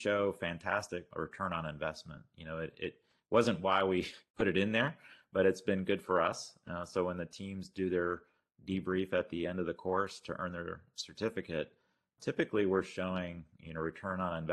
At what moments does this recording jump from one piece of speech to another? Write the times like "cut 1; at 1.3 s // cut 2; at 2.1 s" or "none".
none

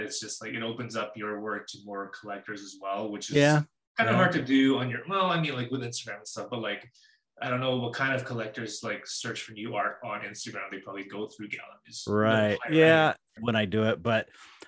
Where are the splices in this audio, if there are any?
cut 1; at 13.4 s

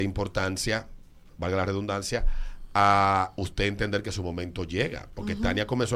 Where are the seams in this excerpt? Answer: none

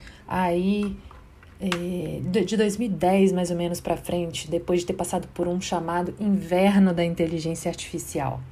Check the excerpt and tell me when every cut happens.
none

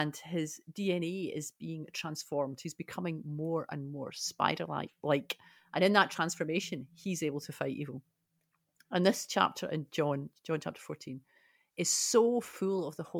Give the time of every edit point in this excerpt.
none

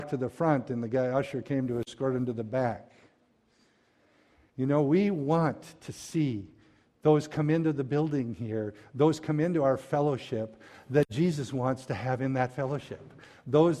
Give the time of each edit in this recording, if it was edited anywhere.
cut 1; at 4.5 s

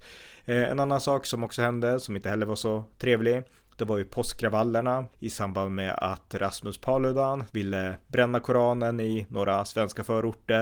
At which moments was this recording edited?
cut 1; at 5.1 s // cut 2; at 7.5 s

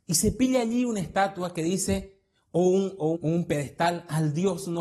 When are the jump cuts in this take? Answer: cut 1; at 3.1 s

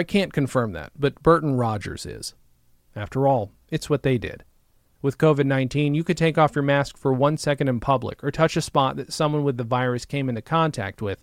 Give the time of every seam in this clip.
cut 1; at 2.9 s // cut 2; at 5.0 s

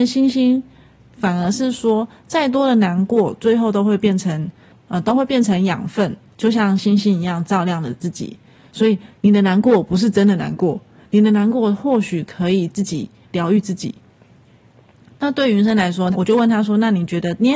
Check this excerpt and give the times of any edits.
cut 1; at 9.1 s // cut 2; at 16.1 s

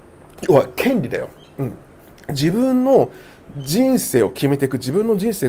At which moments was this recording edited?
none

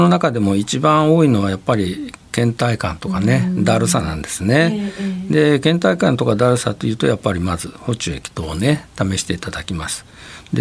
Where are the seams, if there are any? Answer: none

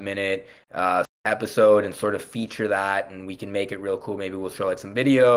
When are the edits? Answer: cut 1; at 1.0 s

